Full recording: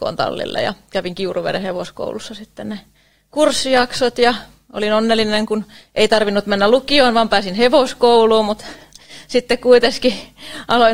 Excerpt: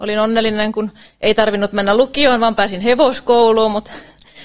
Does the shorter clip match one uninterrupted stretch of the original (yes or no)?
yes